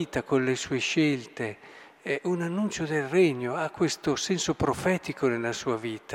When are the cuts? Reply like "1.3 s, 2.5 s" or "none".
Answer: none